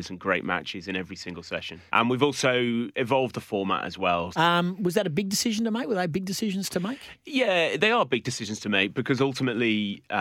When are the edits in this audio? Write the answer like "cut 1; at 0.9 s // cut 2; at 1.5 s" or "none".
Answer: cut 1; at 1.9 s // cut 2; at 4.3 s